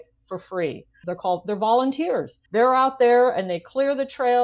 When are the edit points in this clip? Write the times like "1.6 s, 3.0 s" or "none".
1.0 s, 2.5 s